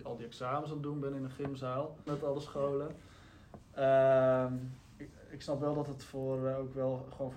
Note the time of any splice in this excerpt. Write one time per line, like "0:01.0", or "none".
0:02.1